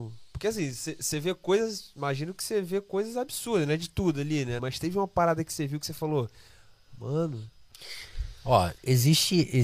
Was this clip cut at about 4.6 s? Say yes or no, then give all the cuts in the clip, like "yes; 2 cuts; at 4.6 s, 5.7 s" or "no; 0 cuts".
yes; 1 cut; at 4.6 s